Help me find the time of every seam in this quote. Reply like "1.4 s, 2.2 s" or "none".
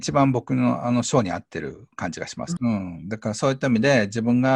2.6 s

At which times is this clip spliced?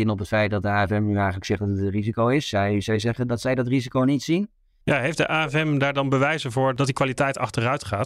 4.8 s

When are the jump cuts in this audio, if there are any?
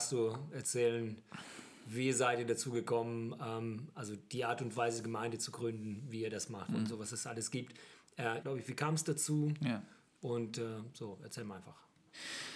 6.7 s, 8.4 s

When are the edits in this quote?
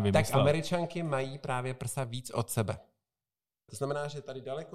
3.7 s

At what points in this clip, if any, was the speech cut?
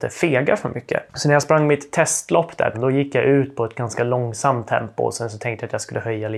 2.7 s

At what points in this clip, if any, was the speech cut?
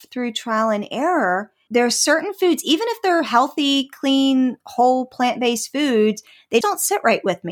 1.7 s, 6.6 s

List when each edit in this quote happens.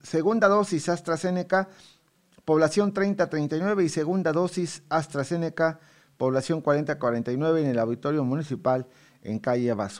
none

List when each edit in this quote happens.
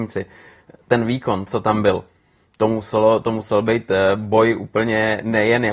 none

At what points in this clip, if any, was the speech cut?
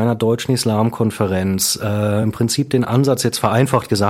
none

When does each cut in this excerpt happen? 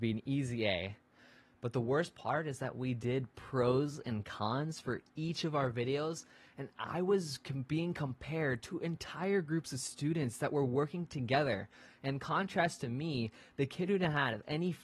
1.4 s

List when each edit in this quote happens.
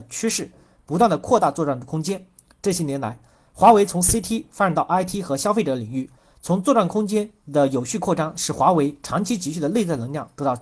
none

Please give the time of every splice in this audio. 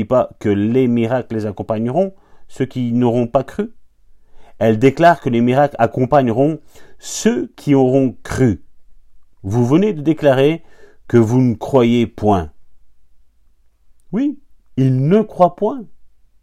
none

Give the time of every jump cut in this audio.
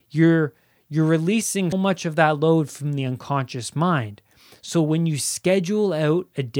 1.7 s

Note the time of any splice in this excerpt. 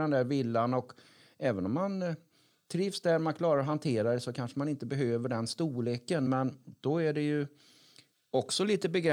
none

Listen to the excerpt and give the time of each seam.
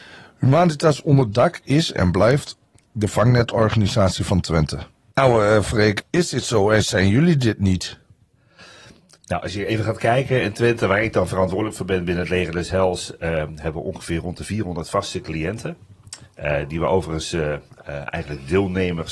5.1 s

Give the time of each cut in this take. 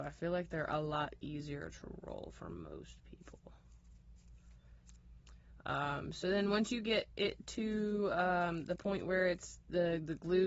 none

